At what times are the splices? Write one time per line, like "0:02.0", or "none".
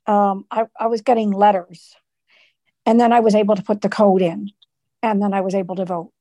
0:02.7